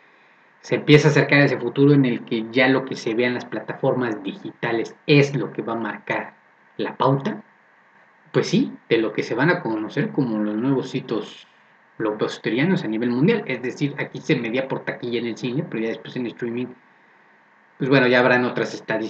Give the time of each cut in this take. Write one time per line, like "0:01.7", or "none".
none